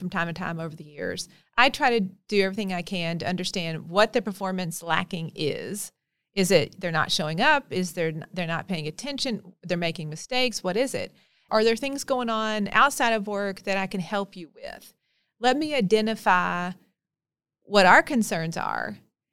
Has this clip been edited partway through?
yes; 1 cut; at 11.5 s

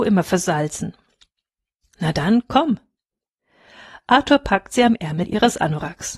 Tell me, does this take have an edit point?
no; 0 cuts

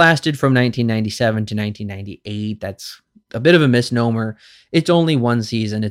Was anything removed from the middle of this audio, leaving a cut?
no; 0 cuts

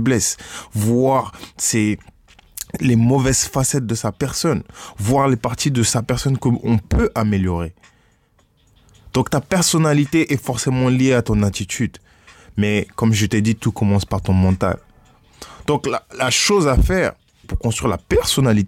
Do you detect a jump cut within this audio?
yes; 2 cuts; at 16.1 s, 17.4 s

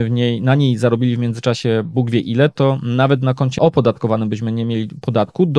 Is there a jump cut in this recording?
no; 0 cuts

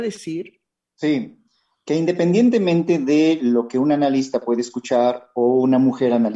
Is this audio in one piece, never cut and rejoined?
yes; 0 cuts

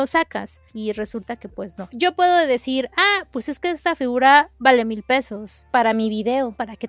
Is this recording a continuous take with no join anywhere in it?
no; 1 cut; at 1.9 s

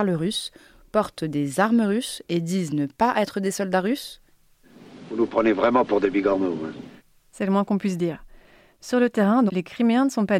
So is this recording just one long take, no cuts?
no; 1 cut; at 9.5 s

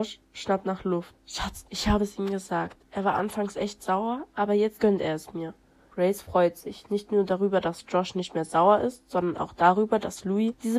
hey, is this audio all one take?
no; 1 cut; at 1.1 s

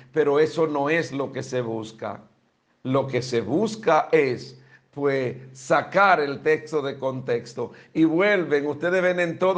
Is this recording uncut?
yes; 0 cuts

